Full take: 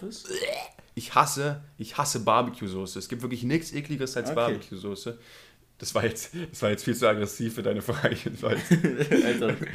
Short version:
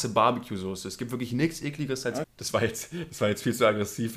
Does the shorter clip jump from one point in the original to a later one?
yes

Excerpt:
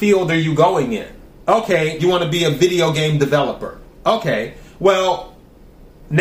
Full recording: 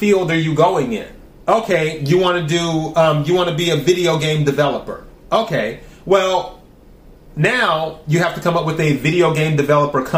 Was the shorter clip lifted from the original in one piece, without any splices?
no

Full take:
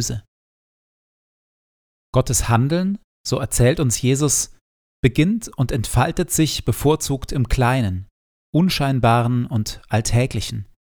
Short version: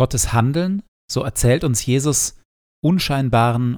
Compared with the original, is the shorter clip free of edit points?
no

